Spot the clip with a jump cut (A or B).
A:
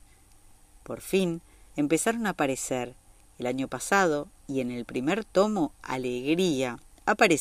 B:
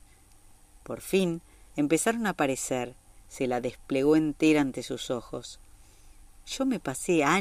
B